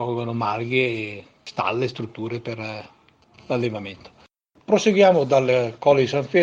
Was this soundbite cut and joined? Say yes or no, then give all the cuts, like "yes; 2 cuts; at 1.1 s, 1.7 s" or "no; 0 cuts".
no; 0 cuts